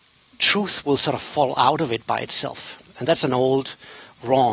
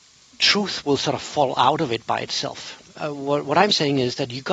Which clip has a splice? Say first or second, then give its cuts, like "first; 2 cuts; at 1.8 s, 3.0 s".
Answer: second; 1 cut; at 2.9 s